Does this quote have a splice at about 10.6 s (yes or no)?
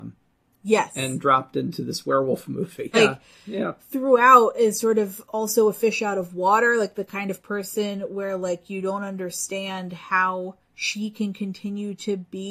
yes